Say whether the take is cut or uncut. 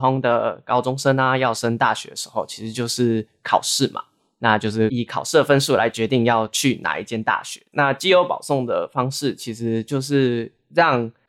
uncut